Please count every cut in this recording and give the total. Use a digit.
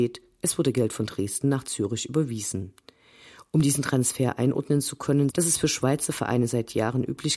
1